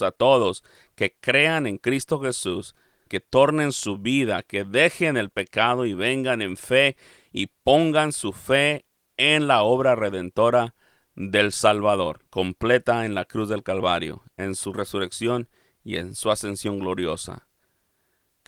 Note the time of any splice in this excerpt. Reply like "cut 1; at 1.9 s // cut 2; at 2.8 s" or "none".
cut 1; at 3.1 s // cut 2; at 12.3 s